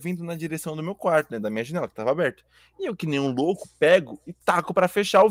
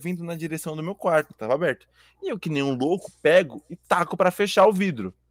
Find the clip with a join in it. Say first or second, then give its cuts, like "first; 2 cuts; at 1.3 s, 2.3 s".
second; 1 cut; at 1.3 s